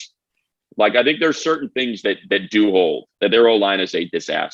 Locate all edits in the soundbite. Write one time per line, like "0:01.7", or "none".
0:03.1